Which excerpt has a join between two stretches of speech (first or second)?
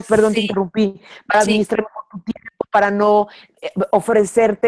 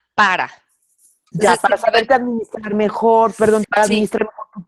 second